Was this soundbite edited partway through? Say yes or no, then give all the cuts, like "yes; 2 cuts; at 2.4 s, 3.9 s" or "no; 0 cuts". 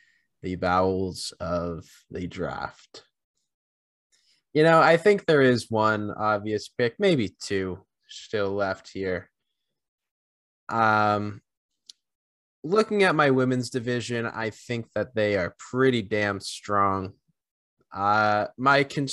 no; 0 cuts